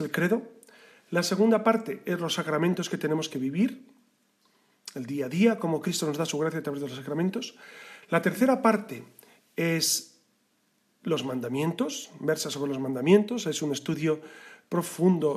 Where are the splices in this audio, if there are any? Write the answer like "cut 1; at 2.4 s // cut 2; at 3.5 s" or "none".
none